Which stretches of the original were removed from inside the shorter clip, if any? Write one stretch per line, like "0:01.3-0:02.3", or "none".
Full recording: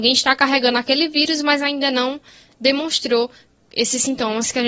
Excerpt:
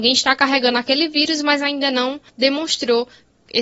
0:02.3-0:02.5